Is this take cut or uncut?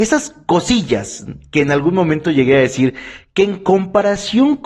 uncut